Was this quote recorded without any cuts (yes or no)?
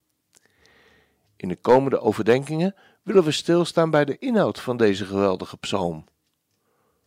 no